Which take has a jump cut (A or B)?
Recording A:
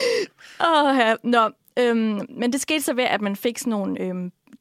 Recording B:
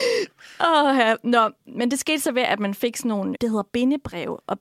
B